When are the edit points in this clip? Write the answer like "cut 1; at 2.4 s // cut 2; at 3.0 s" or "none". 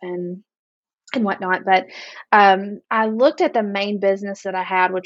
cut 1; at 2.8 s